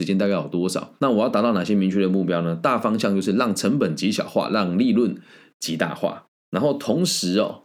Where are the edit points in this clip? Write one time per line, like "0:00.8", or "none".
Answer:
0:01.0